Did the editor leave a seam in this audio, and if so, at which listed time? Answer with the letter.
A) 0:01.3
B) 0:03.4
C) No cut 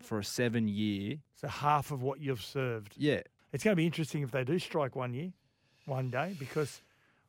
B